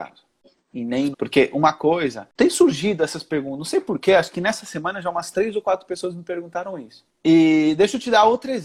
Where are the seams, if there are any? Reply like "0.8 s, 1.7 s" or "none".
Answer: 1.1 s, 7.1 s